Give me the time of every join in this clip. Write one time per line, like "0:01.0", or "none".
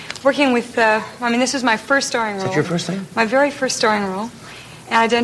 0:02.6